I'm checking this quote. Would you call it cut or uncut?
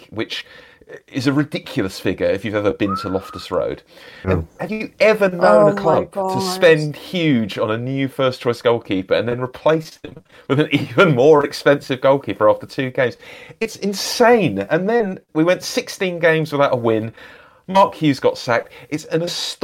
cut